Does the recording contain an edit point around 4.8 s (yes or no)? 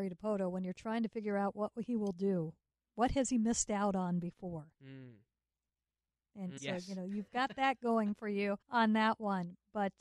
no